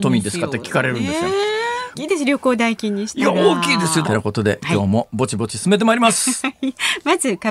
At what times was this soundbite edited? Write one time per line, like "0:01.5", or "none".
0:01.9
0:04.0